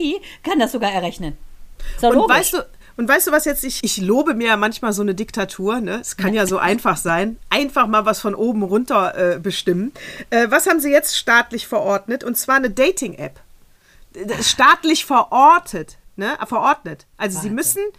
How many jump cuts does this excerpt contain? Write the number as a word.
one